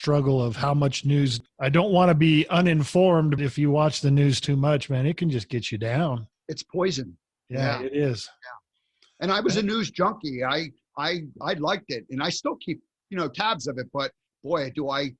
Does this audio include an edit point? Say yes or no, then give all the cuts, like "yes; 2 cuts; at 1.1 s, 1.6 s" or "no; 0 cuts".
yes; 1 cut; at 3.4 s